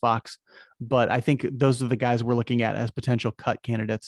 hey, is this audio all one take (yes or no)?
yes